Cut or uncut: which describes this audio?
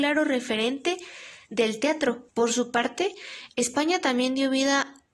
cut